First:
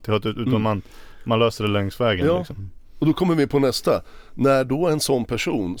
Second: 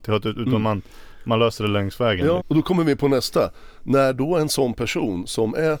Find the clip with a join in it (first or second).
second